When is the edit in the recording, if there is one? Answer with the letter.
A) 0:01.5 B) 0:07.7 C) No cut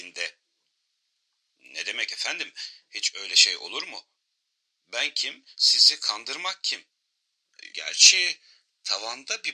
B